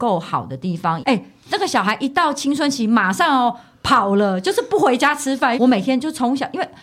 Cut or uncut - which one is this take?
cut